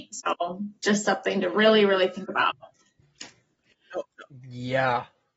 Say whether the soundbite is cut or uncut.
cut